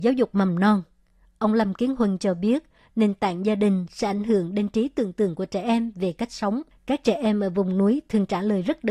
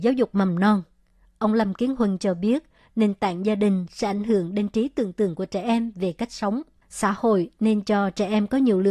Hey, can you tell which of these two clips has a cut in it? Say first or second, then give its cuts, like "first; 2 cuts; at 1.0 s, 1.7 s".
first; 1 cut; at 6.7 s